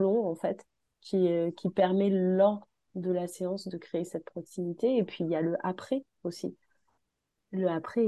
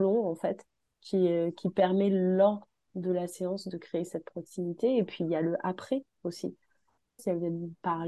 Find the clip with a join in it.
second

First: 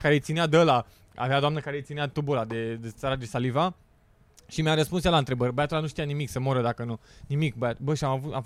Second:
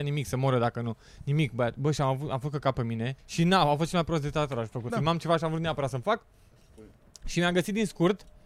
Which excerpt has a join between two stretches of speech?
second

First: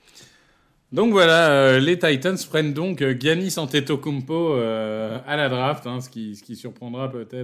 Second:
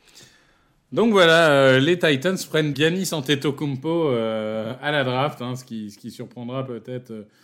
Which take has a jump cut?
second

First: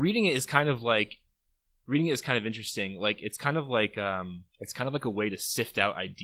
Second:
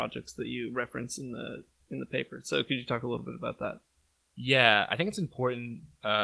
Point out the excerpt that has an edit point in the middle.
first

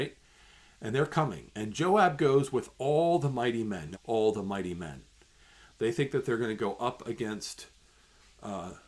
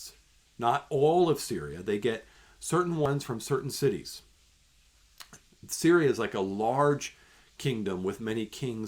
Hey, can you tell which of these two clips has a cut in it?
first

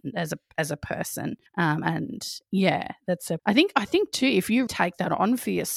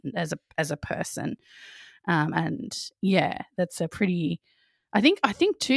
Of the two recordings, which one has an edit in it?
first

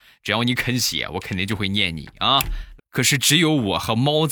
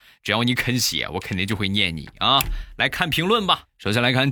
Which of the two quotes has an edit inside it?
first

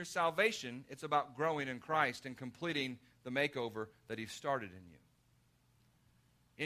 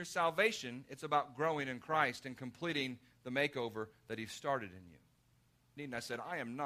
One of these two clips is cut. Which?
second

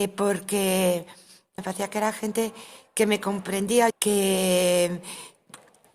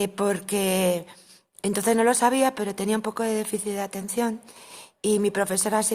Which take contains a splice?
first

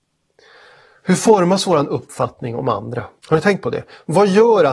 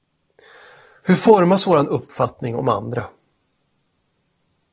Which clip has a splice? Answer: first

